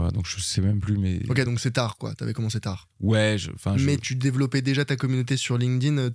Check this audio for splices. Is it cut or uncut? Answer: uncut